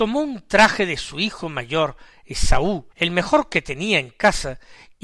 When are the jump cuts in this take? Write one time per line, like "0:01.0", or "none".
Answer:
0:02.9

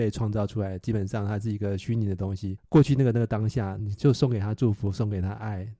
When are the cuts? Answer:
0:02.6
0:03.8

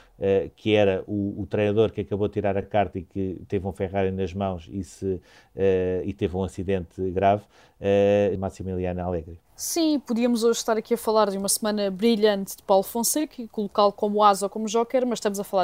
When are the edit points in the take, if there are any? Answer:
0:08.4
0:09.4

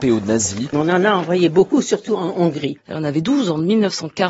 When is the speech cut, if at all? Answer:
0:02.8

